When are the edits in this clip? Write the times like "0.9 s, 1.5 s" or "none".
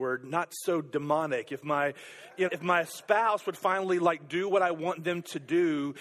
2.5 s